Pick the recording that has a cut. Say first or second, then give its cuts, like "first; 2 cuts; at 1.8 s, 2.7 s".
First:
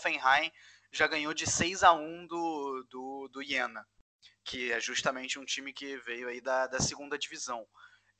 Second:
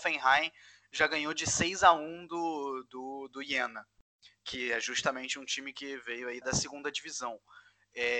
second; 1 cut; at 6.4 s